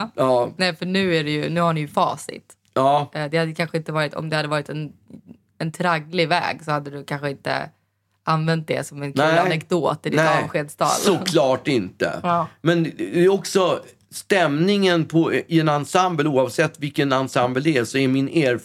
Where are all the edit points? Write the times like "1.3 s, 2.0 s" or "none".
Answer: none